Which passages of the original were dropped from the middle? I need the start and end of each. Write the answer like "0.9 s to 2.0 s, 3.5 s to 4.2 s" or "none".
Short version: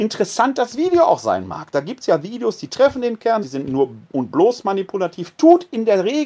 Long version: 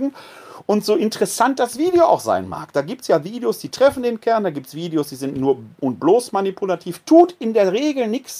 4.4 s to 5.1 s